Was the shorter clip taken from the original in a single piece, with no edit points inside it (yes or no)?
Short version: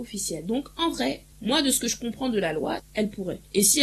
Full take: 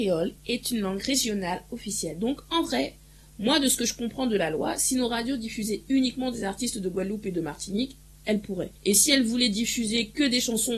no